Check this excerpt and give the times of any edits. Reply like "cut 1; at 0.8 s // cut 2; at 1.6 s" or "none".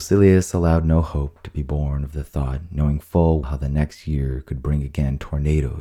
cut 1; at 3.4 s